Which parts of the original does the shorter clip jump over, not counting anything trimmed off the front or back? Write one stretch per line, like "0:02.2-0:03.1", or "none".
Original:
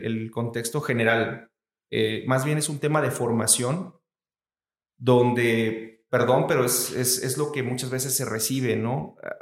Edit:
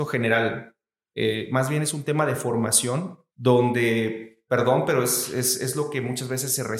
0:04.0-0:04.9